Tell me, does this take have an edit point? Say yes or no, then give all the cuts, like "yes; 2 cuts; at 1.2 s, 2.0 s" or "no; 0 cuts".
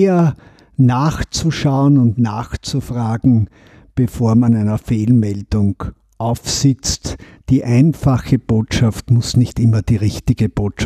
no; 0 cuts